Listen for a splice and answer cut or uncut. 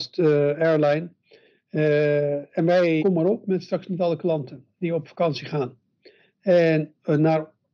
cut